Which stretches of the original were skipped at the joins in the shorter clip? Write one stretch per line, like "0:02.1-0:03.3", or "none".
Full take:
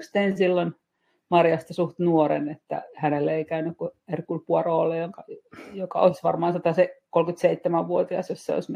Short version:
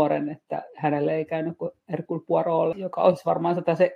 0:04.9-0:05.7